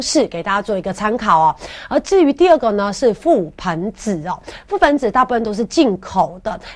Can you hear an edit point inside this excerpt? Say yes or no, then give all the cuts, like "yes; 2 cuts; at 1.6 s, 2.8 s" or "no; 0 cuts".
no; 0 cuts